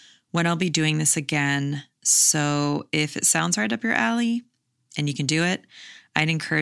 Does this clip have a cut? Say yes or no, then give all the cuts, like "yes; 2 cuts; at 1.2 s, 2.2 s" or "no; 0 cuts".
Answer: no; 0 cuts